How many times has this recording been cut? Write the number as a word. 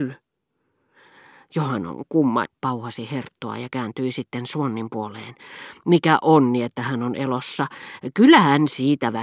one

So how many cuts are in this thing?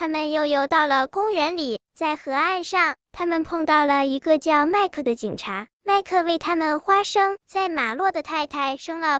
one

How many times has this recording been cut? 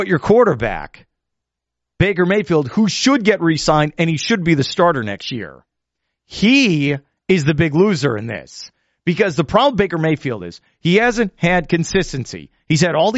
zero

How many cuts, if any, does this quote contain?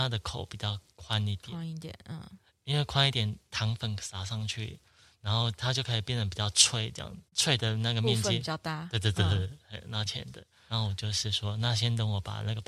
one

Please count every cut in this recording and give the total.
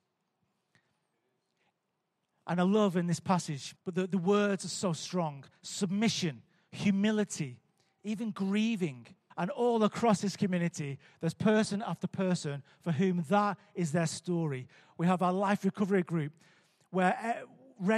two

